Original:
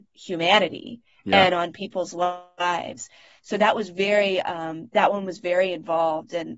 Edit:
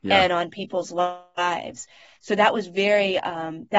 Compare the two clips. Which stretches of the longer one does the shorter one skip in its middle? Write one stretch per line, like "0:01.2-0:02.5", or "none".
none